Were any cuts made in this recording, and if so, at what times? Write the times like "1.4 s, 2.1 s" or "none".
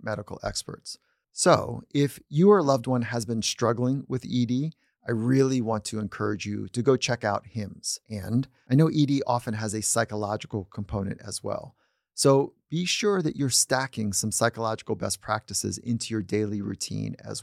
none